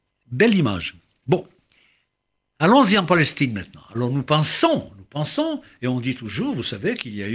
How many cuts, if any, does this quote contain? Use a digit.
0